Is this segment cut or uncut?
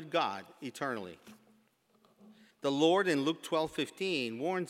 cut